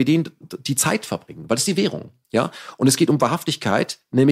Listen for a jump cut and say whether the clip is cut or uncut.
uncut